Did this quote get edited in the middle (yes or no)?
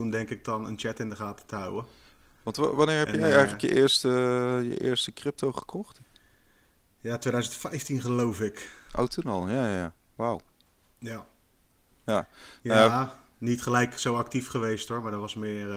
no